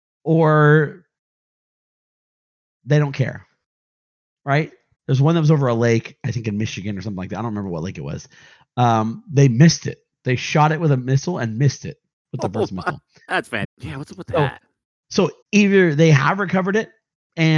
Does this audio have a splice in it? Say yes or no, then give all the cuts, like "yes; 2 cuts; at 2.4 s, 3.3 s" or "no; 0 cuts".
yes; 3 cuts; at 4.9 s, 13.6 s, 15.4 s